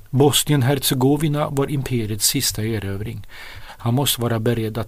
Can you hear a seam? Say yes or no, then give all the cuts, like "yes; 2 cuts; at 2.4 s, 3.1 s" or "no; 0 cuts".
yes; 1 cut; at 3.6 s